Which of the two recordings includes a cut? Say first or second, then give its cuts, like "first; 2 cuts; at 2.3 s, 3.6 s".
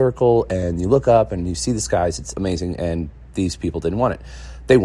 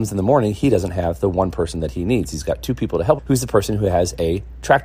second; 1 cut; at 3.2 s